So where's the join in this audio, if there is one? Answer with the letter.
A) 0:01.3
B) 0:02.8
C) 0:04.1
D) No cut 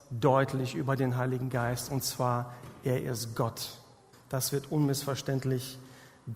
C